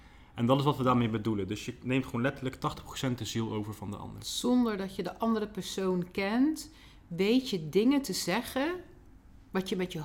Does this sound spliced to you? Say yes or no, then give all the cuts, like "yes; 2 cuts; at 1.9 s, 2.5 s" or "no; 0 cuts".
no; 0 cuts